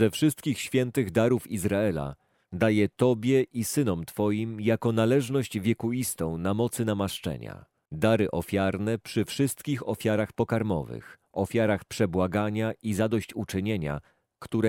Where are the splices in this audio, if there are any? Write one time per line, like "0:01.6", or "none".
0:07.9